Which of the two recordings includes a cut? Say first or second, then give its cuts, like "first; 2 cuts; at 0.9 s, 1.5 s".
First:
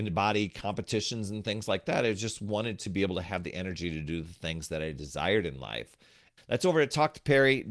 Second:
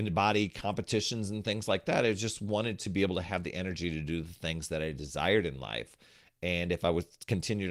first; 1 cut; at 6.4 s